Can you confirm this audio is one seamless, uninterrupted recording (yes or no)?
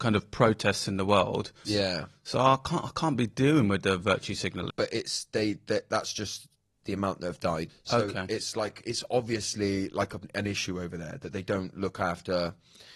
no